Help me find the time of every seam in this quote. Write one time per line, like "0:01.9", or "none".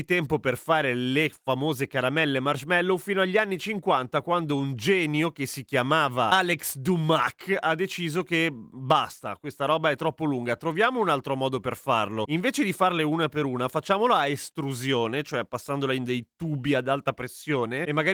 none

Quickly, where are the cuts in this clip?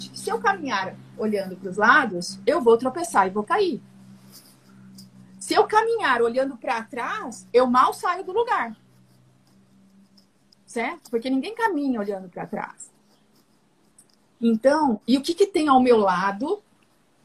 none

